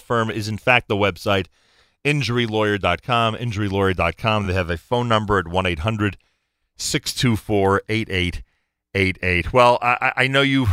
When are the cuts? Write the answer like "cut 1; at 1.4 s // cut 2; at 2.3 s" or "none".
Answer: none